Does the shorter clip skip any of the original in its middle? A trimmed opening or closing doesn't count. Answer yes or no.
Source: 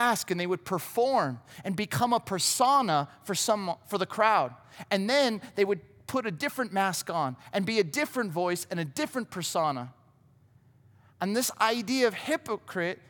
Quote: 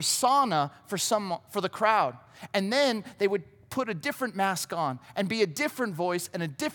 no